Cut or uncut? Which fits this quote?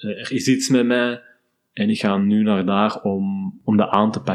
uncut